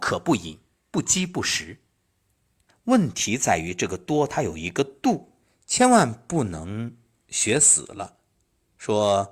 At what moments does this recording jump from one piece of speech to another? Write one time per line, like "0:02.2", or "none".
0:02.7